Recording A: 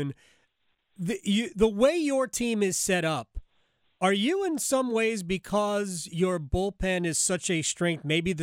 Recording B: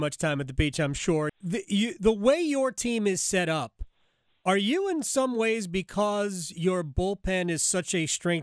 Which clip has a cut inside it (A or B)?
B